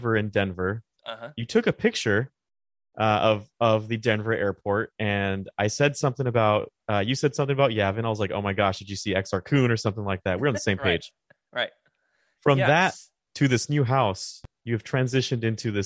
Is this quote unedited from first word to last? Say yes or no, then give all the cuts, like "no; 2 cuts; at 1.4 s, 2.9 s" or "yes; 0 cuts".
yes; 0 cuts